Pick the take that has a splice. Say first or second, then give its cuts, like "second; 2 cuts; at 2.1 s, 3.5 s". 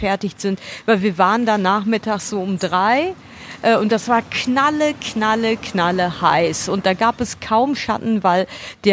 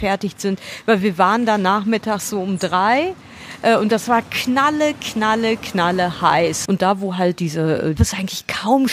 second; 2 cuts; at 6.6 s, 8.0 s